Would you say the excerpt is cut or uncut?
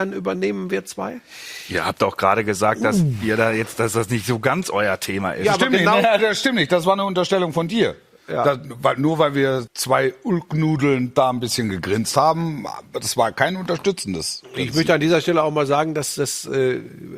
cut